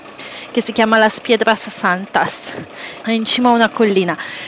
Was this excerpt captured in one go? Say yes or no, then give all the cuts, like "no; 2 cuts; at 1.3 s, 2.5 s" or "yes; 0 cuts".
no; 1 cut; at 3.0 s